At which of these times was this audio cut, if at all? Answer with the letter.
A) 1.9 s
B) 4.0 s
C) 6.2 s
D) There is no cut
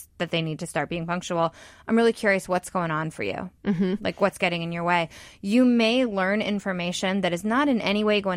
D